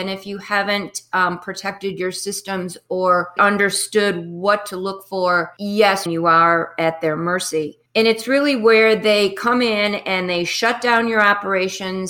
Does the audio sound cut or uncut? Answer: cut